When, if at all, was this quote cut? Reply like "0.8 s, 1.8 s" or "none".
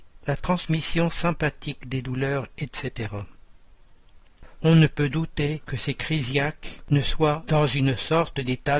5.1 s